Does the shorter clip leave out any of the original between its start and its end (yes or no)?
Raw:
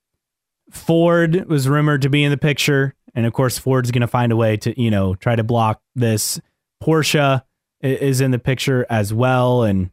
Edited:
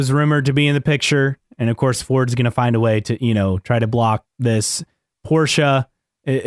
no